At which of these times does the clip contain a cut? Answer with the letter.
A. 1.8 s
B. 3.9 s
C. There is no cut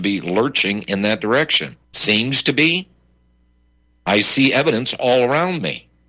A